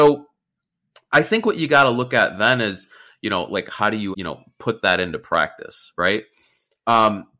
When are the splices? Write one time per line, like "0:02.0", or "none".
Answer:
0:04.1